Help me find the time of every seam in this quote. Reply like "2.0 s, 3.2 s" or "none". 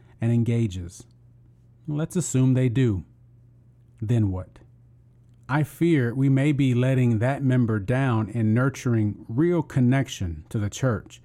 none